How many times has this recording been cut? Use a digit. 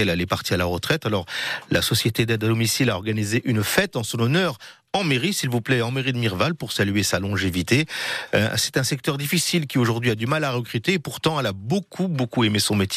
0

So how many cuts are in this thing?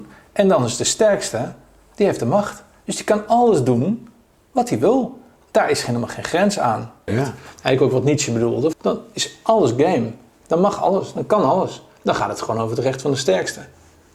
2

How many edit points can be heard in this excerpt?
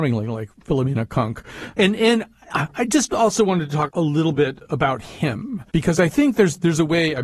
3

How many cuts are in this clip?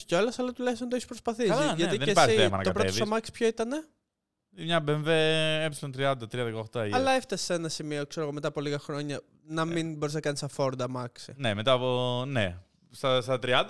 0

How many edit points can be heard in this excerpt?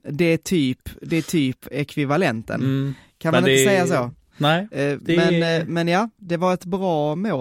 1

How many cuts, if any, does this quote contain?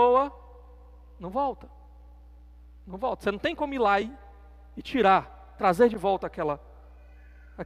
0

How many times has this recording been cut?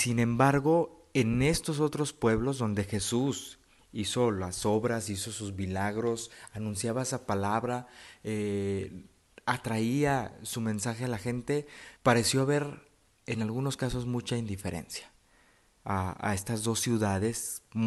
2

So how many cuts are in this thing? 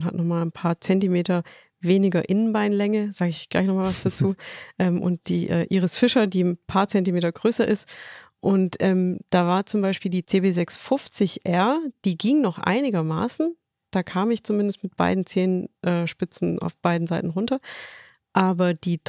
0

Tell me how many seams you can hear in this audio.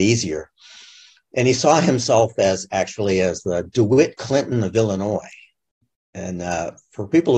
0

